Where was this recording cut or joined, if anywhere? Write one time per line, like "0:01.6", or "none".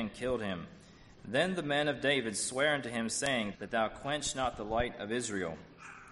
0:03.5